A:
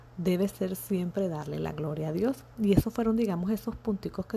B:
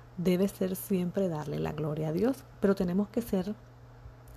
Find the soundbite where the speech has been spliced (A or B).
B